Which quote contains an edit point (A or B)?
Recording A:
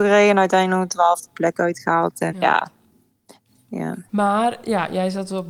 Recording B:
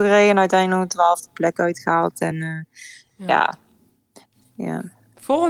A